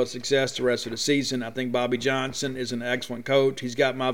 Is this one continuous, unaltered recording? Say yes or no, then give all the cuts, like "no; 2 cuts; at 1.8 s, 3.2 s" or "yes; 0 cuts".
yes; 0 cuts